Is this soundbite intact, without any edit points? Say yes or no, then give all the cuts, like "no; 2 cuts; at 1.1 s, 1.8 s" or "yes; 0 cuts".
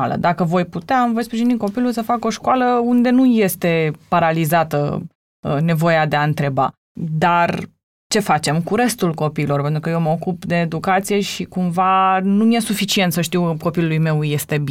yes; 0 cuts